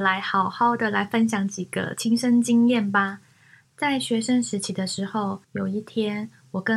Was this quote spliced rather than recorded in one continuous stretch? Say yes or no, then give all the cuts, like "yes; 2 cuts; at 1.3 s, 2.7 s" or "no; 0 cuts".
yes; 2 cuts; at 3.6 s, 5.4 s